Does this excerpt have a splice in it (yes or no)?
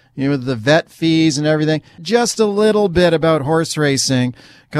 yes